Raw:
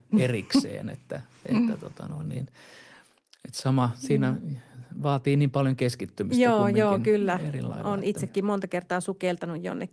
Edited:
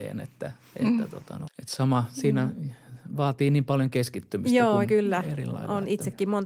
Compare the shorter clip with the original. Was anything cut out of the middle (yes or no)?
yes